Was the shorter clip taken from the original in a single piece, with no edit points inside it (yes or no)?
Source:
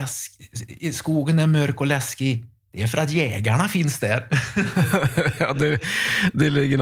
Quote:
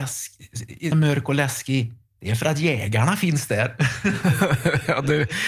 no